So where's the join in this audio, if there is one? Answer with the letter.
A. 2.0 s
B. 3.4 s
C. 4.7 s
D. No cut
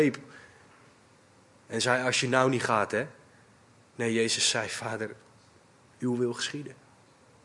D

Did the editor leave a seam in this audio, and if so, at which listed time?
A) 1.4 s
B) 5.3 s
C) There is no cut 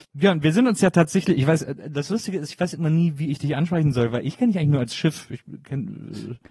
C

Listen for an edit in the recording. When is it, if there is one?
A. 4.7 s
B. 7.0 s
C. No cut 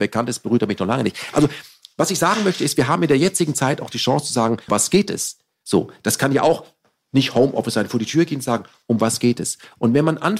A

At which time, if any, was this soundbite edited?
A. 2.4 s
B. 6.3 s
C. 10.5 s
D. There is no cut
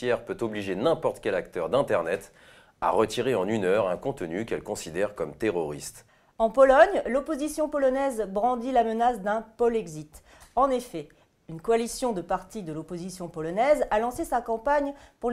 D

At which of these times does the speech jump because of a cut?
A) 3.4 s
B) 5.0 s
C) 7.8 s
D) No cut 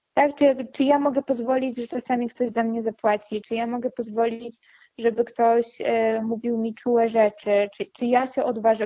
A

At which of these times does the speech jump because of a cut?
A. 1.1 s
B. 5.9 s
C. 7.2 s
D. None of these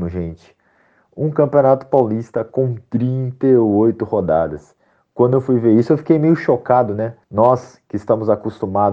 C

